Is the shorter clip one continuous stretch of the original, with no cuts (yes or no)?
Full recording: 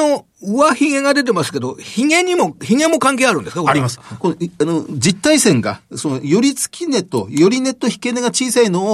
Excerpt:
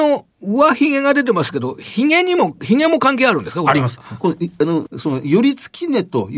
no